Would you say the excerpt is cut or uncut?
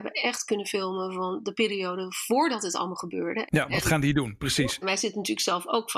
cut